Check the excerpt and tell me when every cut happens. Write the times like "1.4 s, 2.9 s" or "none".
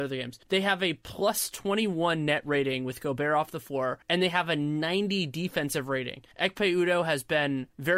none

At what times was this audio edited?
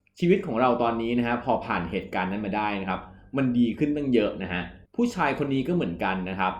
4.9 s

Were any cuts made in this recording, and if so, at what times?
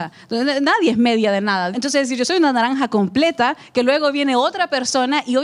1.7 s

